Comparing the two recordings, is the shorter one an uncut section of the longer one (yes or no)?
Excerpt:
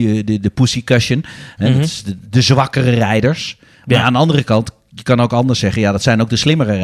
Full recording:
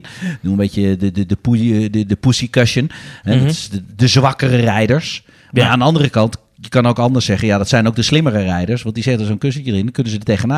yes